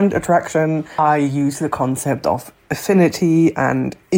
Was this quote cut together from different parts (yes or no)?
no